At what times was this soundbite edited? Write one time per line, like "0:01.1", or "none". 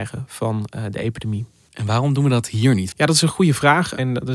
0:02.9